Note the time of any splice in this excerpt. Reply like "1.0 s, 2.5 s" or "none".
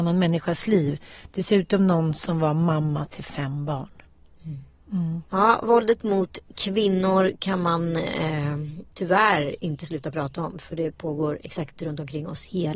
5.3 s